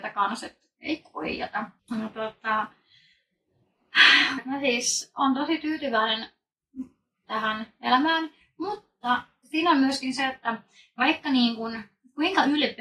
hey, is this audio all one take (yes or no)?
no